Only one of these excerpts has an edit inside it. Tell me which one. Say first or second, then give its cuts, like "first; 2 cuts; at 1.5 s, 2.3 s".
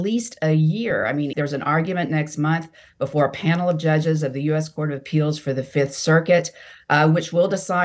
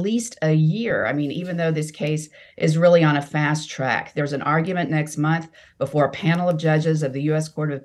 first; 1 cut; at 1.3 s